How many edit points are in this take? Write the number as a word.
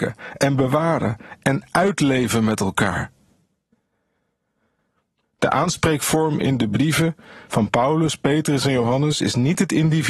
one